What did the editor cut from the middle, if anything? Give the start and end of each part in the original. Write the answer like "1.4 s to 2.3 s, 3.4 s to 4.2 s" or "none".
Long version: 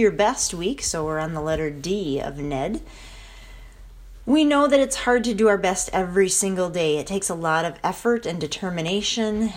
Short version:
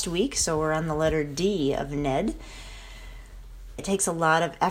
4.2 s to 7.0 s